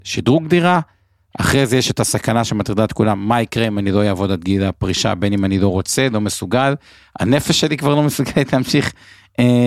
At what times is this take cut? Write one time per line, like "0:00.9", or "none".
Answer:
none